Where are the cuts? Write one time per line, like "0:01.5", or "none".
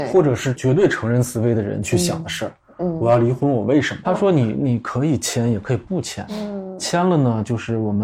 0:04.0